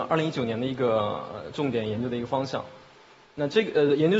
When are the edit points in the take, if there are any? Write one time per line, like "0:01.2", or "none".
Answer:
none